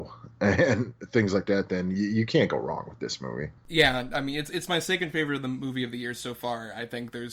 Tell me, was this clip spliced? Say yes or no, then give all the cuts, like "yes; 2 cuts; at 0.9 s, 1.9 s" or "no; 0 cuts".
yes; 1 cut; at 3.6 s